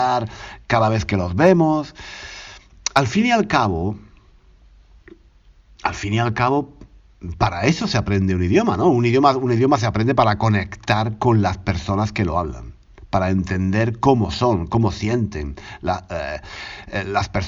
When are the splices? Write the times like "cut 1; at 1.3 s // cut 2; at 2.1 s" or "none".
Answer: none